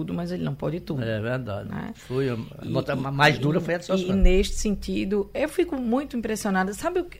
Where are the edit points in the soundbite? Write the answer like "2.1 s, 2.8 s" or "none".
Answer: none